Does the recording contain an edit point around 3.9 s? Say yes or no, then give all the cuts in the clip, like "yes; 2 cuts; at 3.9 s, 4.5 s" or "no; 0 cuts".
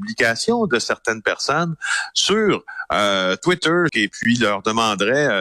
yes; 1 cut; at 3.9 s